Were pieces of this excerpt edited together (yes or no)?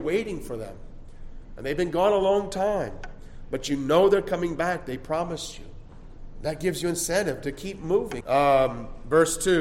yes